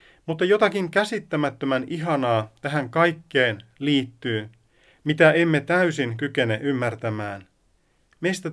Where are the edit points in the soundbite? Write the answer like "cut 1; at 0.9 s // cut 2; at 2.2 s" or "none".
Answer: none